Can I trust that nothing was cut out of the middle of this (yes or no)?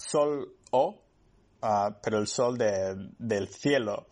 yes